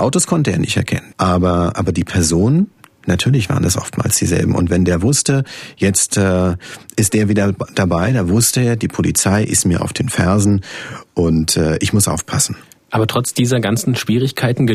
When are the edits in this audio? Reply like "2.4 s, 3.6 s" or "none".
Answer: 1.1 s